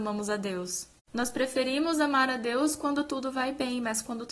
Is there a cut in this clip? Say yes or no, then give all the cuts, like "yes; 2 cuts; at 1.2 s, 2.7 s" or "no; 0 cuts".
no; 0 cuts